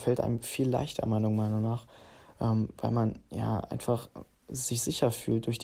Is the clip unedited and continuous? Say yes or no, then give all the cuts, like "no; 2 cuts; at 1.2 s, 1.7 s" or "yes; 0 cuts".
yes; 0 cuts